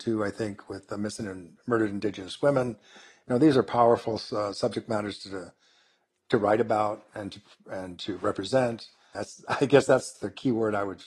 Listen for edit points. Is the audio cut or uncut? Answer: cut